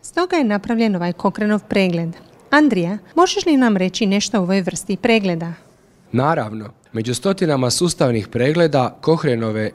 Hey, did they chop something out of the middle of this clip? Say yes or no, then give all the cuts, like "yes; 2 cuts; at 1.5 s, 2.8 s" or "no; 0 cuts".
no; 0 cuts